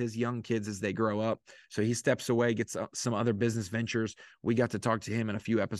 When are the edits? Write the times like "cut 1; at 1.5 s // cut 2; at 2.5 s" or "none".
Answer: none